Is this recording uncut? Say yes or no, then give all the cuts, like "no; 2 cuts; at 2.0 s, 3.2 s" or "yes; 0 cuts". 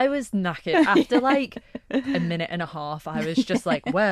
yes; 0 cuts